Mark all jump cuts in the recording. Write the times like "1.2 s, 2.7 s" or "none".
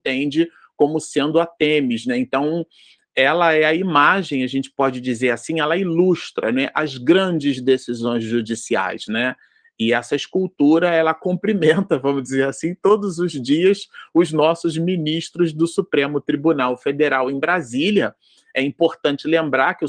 none